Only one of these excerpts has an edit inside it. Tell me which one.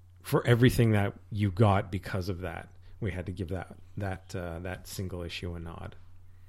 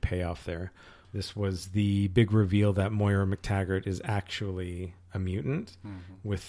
second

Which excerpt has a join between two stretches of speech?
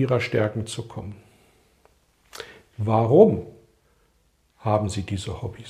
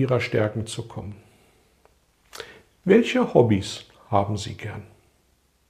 first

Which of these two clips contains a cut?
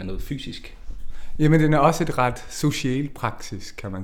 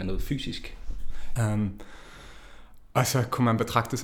second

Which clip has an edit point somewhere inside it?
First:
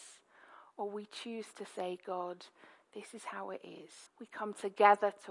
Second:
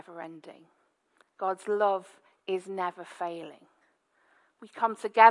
first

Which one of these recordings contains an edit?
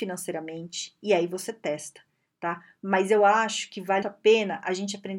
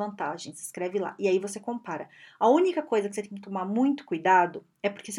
first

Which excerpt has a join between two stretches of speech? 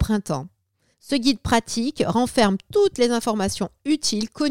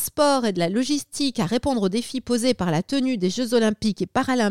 first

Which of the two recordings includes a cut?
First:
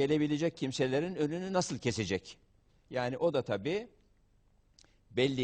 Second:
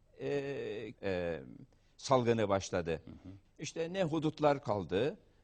second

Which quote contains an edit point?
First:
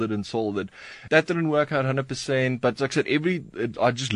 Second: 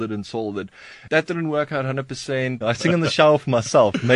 second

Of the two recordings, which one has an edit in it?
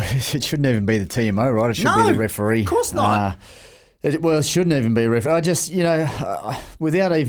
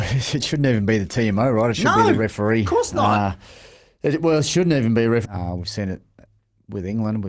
second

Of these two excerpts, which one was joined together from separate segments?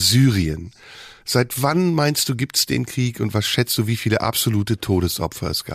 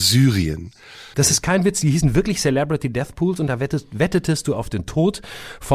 second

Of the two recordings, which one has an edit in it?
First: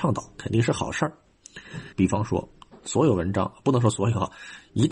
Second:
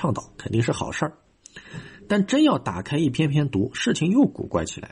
first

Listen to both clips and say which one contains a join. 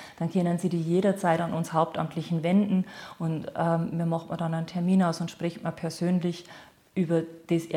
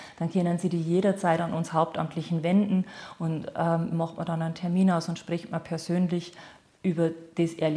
second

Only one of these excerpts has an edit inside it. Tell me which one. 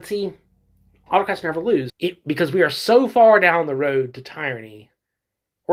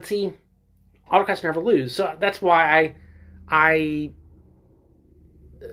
first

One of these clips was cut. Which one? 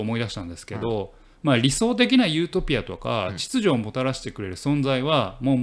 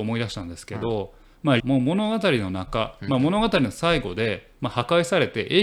second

